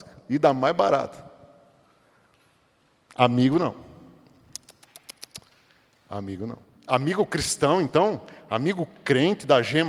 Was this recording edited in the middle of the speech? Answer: no; 0 cuts

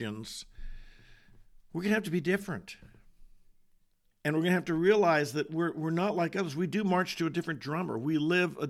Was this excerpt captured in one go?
no; 1 cut; at 4.1 s

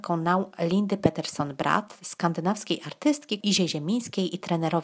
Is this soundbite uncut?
no; 1 cut; at 3.4 s

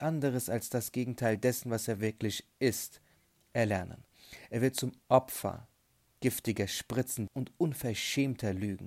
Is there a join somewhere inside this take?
yes; 1 cut; at 7.3 s

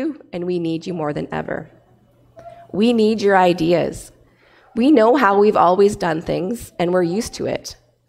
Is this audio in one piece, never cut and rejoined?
yes; 0 cuts

